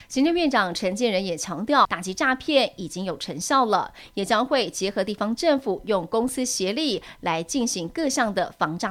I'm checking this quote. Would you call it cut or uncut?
cut